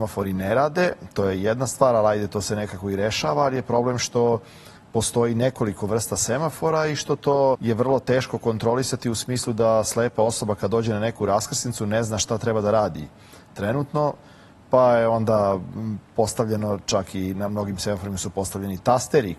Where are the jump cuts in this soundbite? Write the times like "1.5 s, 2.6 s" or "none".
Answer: 7.5 s